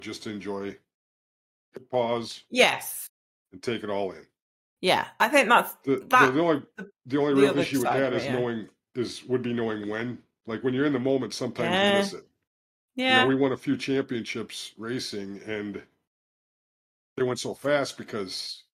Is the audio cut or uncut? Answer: uncut